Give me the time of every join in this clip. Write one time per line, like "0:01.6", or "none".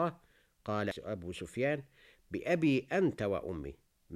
0:00.9